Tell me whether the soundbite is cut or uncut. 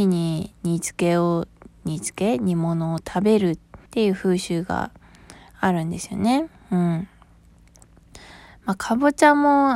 cut